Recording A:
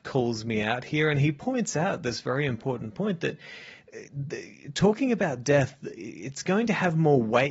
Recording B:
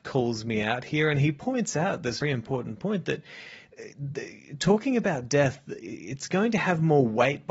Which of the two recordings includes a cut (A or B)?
B